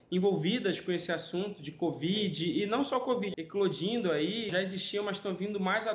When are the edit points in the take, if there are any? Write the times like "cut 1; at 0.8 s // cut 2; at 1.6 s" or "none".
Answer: cut 1; at 3.3 s // cut 2; at 4.5 s